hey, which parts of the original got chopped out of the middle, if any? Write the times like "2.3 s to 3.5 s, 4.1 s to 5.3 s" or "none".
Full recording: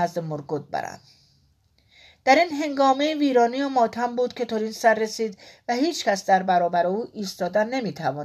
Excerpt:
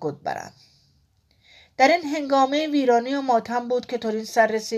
none